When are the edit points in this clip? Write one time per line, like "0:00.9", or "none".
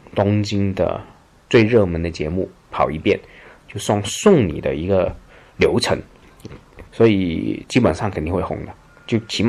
0:06.9